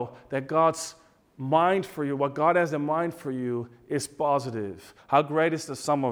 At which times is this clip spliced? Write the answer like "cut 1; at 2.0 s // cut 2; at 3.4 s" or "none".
cut 1; at 5.0 s